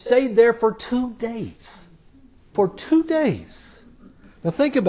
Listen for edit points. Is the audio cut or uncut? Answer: cut